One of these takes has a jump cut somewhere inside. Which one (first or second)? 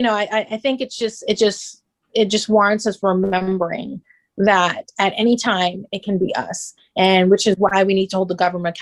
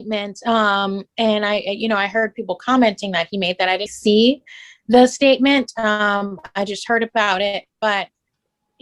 second